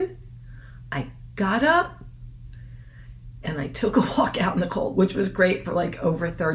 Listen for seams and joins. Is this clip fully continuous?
no; 1 cut; at 3.4 s

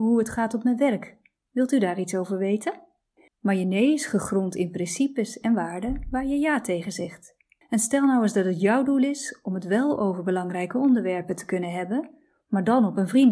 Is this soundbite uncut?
no; 2 cuts; at 3.3 s, 7.6 s

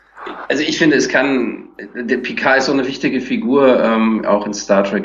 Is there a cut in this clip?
no; 0 cuts

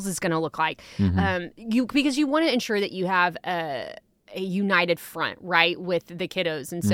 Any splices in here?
no; 0 cuts

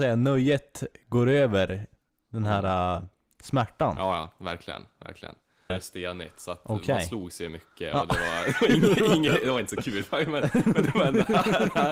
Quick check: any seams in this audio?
yes; 1 cut; at 5.7 s

